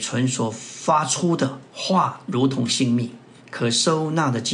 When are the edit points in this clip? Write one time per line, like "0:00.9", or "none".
0:03.4